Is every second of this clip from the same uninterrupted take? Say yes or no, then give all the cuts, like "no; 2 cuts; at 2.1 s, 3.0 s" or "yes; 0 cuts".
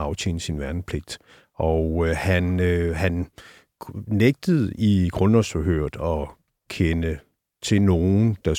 yes; 0 cuts